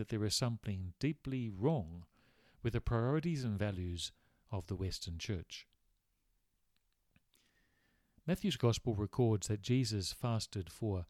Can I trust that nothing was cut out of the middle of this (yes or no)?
yes